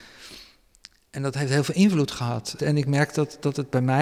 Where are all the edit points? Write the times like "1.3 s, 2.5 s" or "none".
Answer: 2.6 s